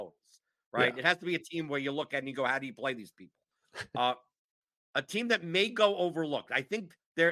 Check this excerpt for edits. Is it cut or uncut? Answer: uncut